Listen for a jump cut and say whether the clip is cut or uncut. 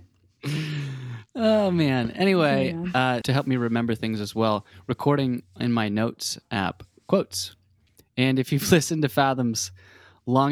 cut